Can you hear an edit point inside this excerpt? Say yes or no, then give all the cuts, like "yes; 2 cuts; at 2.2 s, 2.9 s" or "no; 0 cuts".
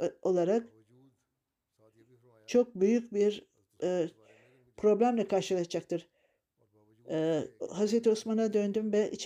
no; 0 cuts